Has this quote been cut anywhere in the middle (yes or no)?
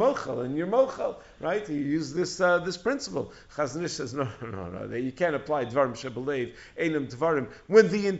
no